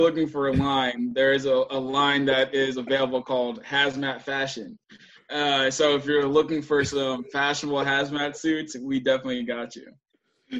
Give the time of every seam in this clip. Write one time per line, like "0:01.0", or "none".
none